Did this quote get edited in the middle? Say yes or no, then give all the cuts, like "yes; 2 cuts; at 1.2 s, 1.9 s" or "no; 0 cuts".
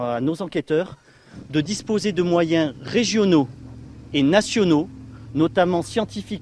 no; 0 cuts